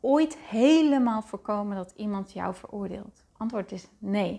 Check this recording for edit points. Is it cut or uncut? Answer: cut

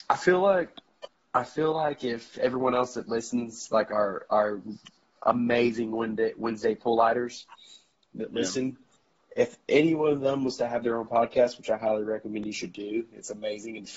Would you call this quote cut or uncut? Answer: uncut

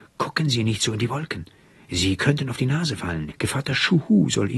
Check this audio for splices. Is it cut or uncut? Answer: cut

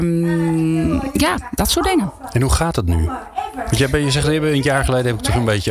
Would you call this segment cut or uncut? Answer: uncut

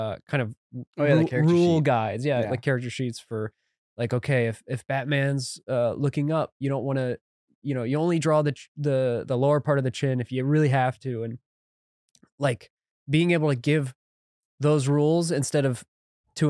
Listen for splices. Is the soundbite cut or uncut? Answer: uncut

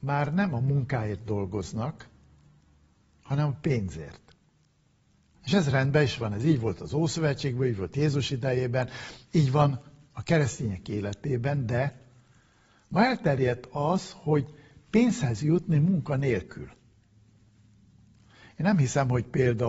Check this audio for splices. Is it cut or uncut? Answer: cut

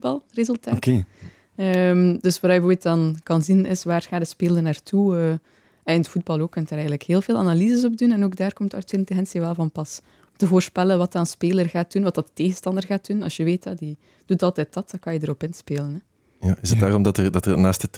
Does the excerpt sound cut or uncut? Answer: uncut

